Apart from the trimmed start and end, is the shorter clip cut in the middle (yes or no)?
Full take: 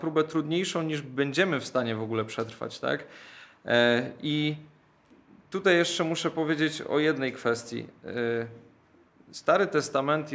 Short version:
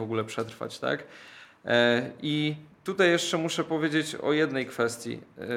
yes